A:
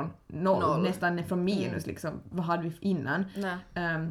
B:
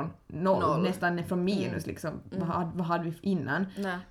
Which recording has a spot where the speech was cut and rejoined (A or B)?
A